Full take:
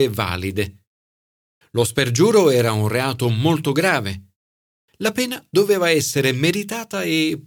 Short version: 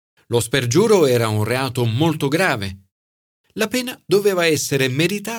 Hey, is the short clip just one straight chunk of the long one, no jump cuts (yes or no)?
yes